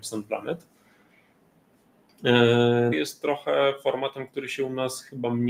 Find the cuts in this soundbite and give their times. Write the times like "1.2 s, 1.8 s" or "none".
2.9 s